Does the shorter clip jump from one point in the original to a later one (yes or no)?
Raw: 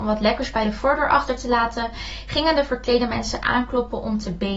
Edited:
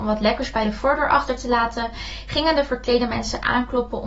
no